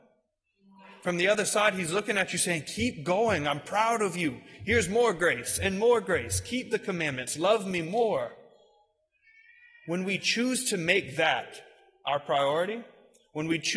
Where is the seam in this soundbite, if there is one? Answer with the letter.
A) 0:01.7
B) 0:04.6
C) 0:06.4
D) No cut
D